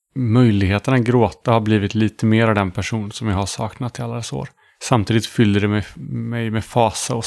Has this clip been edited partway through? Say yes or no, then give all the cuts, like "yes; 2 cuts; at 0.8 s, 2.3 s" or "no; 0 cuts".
no; 0 cuts